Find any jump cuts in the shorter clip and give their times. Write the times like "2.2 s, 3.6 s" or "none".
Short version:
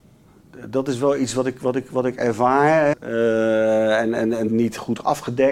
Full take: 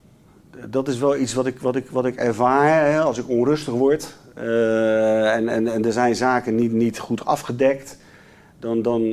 2.9 s, 4.5 s